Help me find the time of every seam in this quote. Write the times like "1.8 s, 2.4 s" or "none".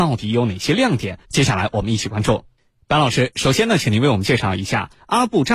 1.2 s